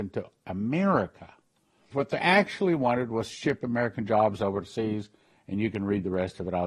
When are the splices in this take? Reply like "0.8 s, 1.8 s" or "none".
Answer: 1.9 s